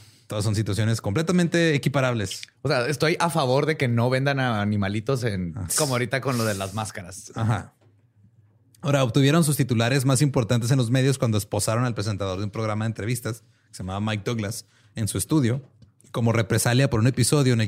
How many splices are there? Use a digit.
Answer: 1